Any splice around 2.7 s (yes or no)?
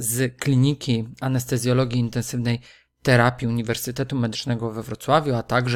no